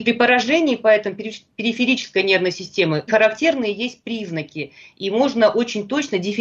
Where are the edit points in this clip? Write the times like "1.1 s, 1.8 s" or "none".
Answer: 3.1 s

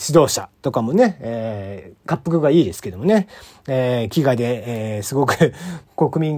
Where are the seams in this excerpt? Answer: 2.0 s

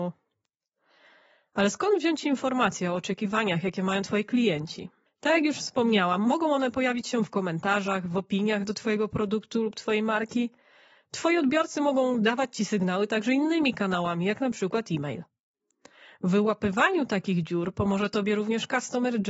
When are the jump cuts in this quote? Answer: 5.1 s

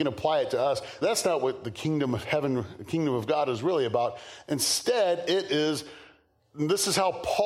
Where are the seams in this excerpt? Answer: 1.0 s

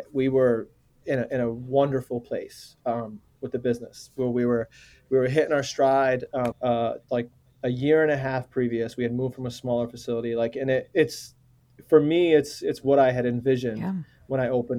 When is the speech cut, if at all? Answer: 6.5 s

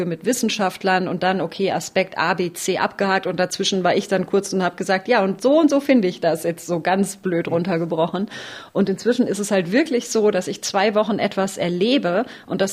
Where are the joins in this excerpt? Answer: none

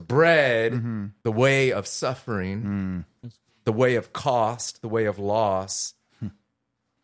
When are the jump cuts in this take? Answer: 1.2 s

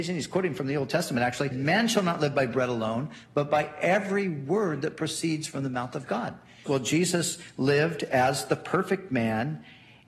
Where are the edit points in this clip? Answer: 1.5 s, 6.7 s

